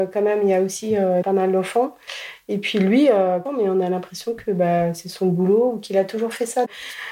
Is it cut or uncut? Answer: cut